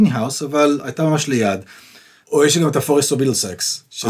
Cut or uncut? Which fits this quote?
cut